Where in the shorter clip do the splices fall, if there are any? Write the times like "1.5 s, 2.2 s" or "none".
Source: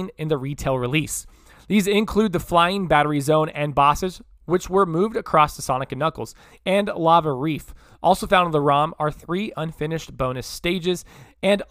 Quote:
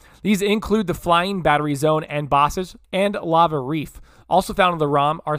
2.8 s

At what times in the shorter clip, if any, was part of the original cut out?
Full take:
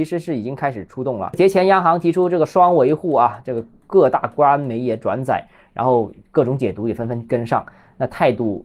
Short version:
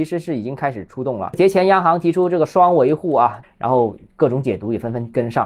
3.4 s

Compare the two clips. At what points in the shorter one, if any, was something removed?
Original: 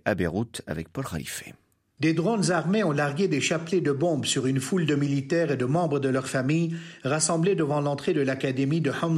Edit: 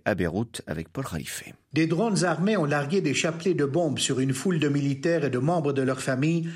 1.6 s

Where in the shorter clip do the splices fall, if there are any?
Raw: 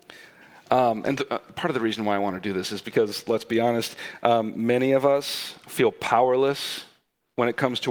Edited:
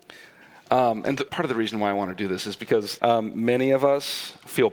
1.3 s, 3.0 s

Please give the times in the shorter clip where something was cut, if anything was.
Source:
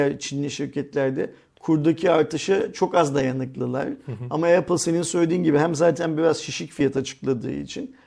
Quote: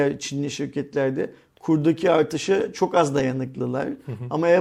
none

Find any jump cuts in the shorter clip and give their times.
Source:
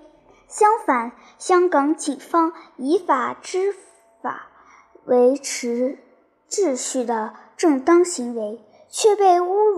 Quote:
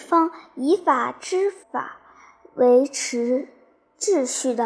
1.6 s

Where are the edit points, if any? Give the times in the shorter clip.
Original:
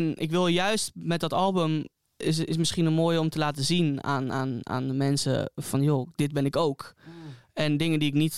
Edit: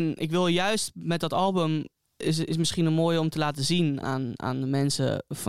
4.0 s

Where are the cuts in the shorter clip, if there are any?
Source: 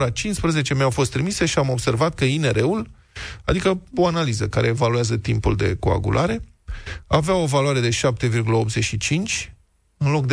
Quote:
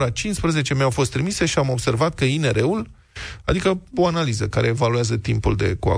none

